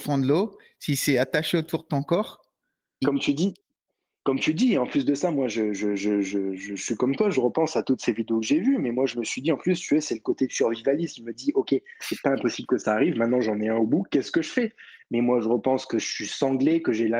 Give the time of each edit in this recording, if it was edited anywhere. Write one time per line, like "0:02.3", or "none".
0:03.0
0:12.0